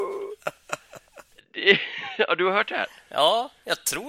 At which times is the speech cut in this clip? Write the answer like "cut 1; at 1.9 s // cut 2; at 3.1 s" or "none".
none